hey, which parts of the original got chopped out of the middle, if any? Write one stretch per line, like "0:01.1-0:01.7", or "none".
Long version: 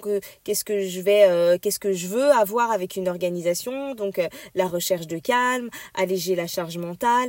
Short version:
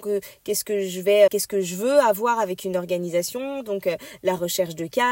0:01.3-0:01.6